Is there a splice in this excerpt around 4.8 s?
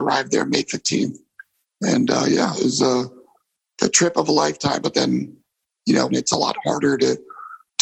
yes; 2 cuts; at 4.8 s, 6.1 s

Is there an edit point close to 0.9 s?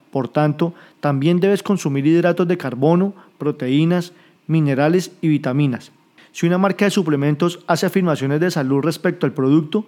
no; 1 cut; at 6.2 s

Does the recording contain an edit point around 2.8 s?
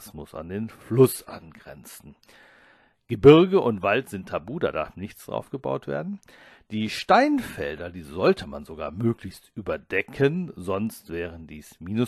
no; 0 cuts

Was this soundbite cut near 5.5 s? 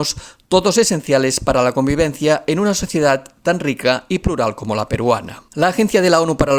yes; 1 cut; at 5.5 s

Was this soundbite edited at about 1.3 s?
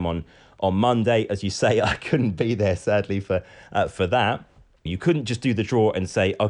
no; 1 cut; at 4.9 s

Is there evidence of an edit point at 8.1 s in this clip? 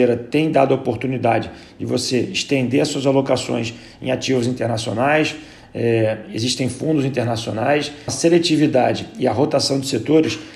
yes; 1 cut; at 8.1 s

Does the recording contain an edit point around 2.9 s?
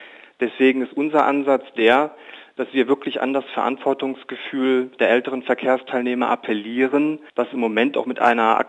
no; 1 cut; at 7.3 s

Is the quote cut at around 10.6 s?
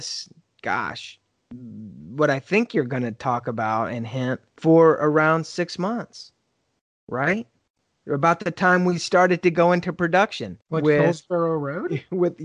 yes; 2 cuts; at 4.5 s, 10.6 s

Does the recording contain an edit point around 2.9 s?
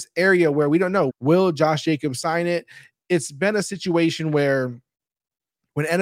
no; 1 cut; at 1.1 s

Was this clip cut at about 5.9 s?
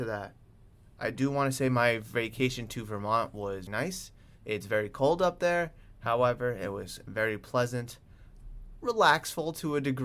no; 1 cut; at 3.7 s

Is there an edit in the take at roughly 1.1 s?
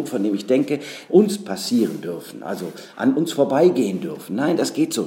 yes; 1 cut; at 1.1 s

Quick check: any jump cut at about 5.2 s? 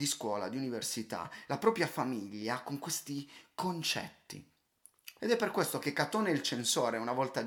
yes; 1 cut; at 5.2 s

